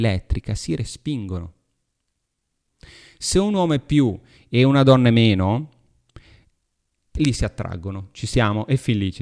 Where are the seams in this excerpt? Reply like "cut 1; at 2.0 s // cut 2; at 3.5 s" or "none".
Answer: none